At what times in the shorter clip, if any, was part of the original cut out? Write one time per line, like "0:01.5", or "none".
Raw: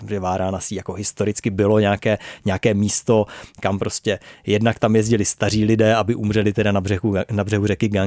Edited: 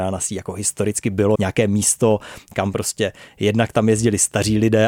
0:01.3